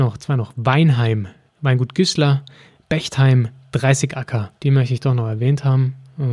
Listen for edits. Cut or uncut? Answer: cut